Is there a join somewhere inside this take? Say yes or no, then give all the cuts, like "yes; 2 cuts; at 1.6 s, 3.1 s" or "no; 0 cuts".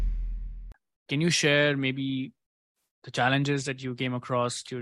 no; 0 cuts